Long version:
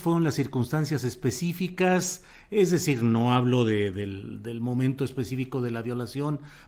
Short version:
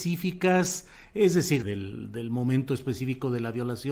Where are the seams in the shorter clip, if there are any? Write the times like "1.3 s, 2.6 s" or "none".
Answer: 1.6 s